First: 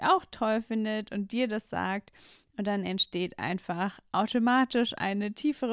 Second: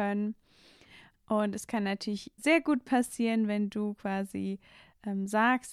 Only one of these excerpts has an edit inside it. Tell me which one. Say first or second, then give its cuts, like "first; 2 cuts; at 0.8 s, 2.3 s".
second; 2 cuts; at 1.1 s, 2.4 s